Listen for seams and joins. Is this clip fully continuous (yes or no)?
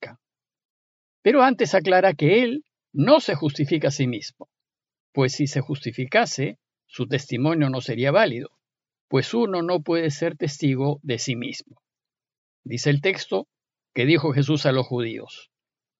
yes